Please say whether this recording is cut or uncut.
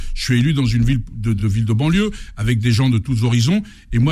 uncut